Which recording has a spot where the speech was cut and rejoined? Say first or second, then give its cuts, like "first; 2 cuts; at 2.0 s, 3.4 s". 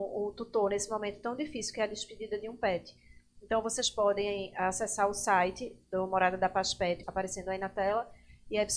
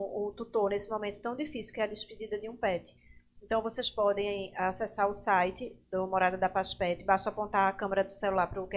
first; 1 cut; at 7.0 s